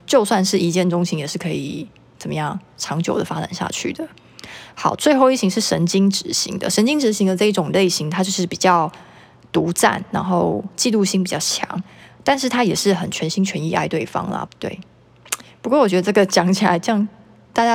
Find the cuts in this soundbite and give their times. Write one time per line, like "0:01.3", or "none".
0:14.5